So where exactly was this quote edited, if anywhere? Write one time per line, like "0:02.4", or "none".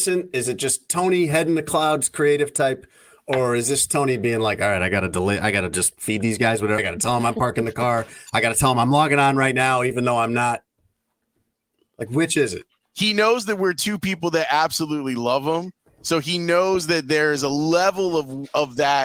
0:06.8